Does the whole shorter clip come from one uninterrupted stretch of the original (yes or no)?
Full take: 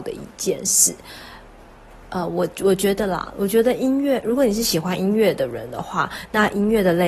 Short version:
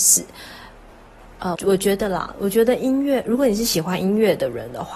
no